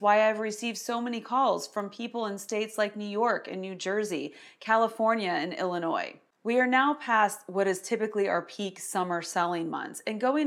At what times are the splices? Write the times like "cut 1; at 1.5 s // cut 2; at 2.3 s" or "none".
none